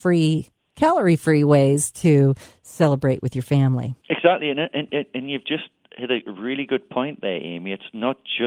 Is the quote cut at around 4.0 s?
yes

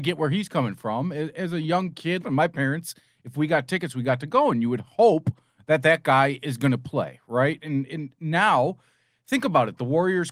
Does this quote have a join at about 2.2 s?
yes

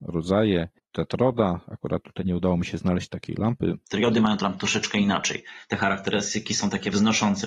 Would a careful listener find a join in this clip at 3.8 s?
yes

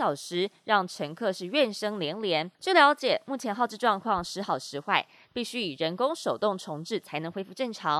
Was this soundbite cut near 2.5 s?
yes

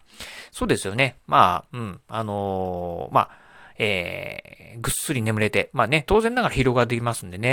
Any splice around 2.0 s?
no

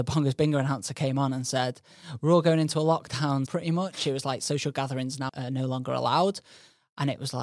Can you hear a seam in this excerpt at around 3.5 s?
yes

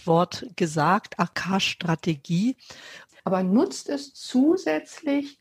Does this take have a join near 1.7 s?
no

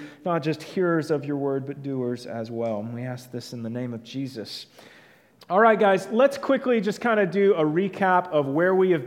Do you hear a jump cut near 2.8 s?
no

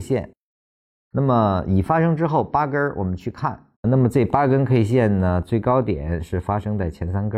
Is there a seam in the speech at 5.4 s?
no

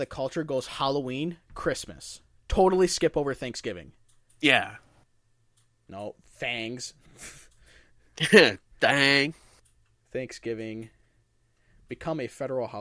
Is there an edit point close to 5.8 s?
yes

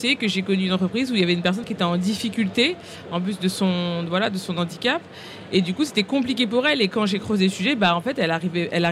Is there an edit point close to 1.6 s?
yes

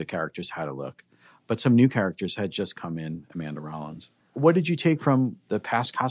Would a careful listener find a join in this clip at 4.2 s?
yes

